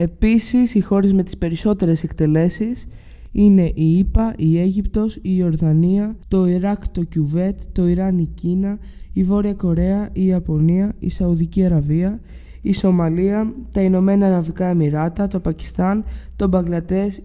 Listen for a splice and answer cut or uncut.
uncut